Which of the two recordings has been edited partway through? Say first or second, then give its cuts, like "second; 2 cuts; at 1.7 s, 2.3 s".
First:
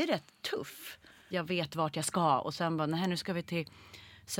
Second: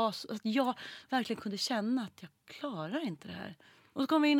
first; 1 cut; at 1.3 s